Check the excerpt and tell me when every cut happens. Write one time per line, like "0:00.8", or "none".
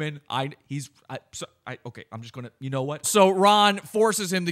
0:03.0